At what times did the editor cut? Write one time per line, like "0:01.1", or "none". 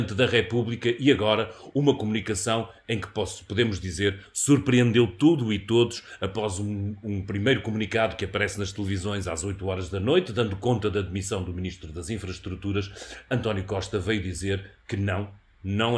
none